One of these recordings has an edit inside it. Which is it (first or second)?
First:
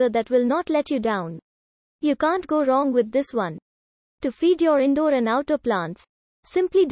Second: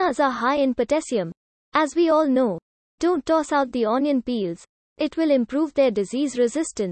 second